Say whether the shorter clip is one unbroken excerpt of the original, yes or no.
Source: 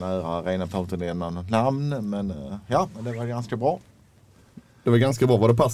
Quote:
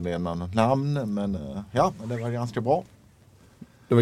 yes